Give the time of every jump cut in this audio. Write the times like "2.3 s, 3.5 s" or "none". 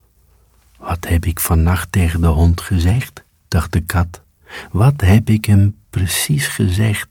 none